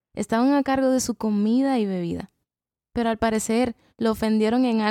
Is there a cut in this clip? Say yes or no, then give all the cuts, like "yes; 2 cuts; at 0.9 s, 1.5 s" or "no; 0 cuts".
no; 0 cuts